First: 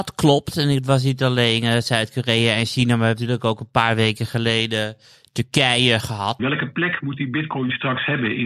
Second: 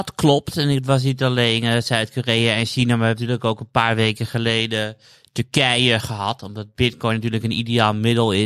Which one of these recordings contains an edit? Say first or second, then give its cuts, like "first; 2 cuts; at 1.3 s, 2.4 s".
first; 1 cut; at 6.4 s